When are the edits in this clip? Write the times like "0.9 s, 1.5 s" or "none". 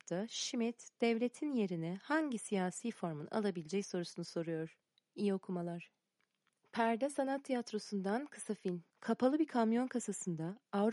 8.9 s

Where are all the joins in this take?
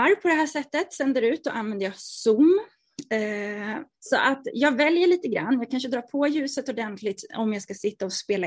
3.9 s

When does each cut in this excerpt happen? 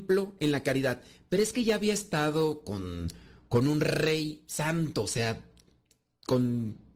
none

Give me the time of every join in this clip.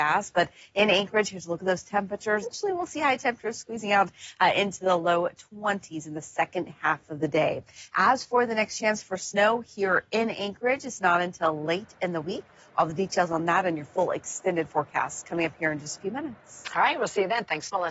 2.4 s

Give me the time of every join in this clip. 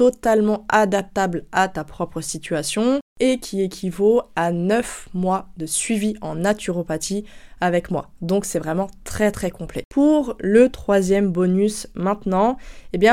9.9 s

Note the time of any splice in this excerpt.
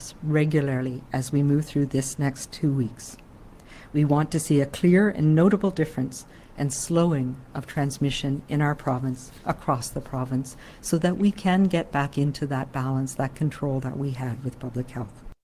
none

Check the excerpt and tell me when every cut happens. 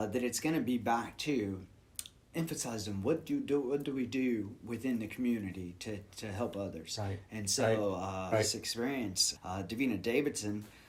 8.3 s, 9.4 s

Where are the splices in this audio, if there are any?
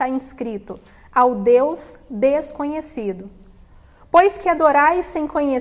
none

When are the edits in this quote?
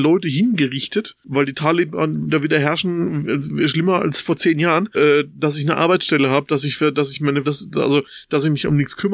4.9 s, 7.4 s

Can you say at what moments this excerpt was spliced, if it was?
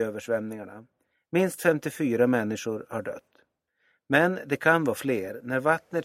none

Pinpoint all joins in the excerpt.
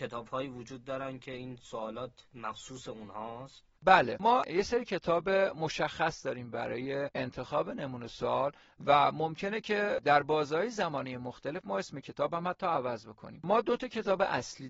3.8 s

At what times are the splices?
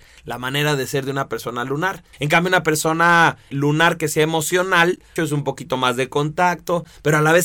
2.1 s, 3.5 s, 5.2 s

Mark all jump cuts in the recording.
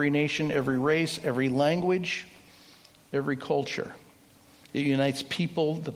none

